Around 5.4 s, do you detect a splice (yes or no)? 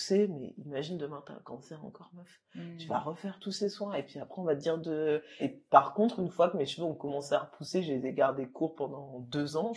yes